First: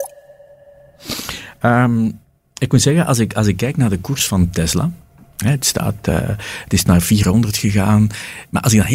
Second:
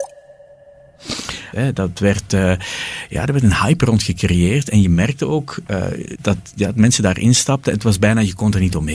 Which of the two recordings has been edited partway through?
second; 2 cuts; at 1.5 s, 6.1 s

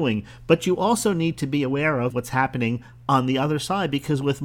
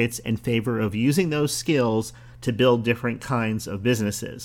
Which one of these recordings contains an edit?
first; 1 cut; at 2.1 s

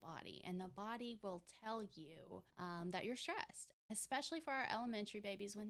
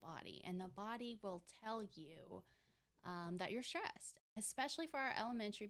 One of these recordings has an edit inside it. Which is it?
first; 1 cut; at 2.5 s

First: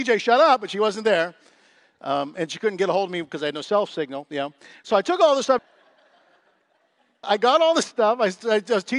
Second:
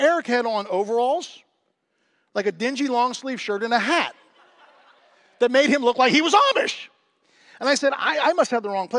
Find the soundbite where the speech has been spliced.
first; 2 cuts; at 5.6 s, 7.2 s

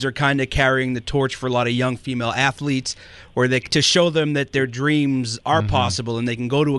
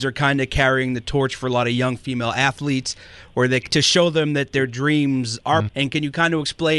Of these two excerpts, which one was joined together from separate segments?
second; 1 cut; at 5.7 s

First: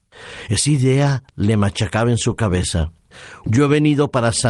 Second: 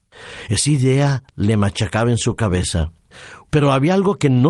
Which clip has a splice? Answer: first; 1 cut; at 3.4 s

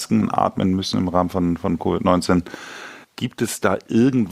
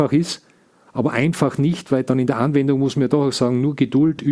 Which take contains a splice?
first; 1 cut; at 3.0 s

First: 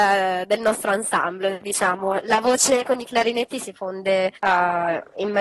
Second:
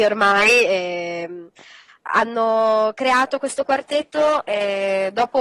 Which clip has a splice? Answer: first; 1 cut; at 4.4 s

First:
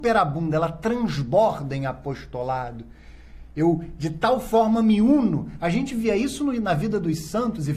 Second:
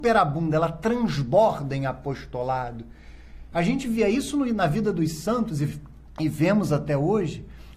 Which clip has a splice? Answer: second; 1 cut; at 3.5 s

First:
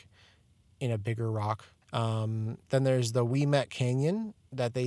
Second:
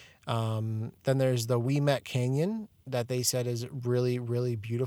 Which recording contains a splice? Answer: first; 1 cut; at 1.8 s

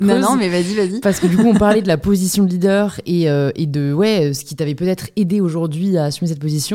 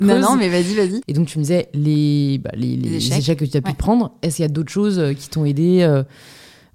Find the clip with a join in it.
second; 1 cut; at 1.0 s

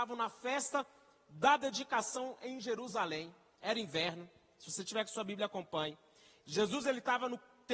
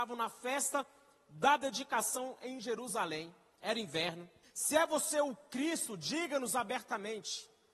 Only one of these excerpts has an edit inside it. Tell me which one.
second; 1 cut; at 4.4 s

